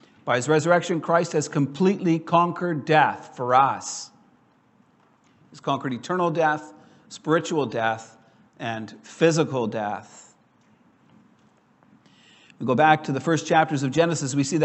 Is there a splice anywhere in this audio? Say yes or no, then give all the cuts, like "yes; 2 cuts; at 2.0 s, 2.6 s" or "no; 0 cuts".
no; 0 cuts